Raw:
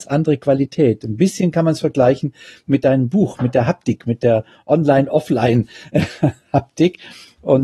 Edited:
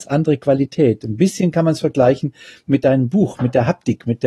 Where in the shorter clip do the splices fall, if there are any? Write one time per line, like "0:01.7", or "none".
none